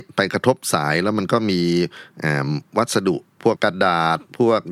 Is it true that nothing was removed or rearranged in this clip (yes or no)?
no